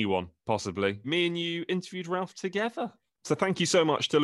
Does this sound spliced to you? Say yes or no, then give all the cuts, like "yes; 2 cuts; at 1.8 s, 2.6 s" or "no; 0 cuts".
yes; 2 cuts; at 1.0 s, 3.1 s